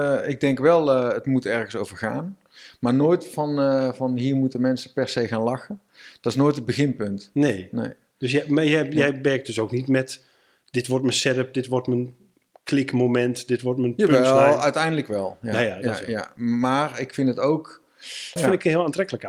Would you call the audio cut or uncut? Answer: cut